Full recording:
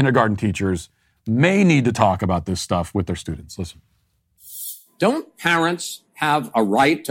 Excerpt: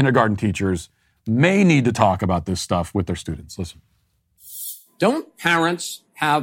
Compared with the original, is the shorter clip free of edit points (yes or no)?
yes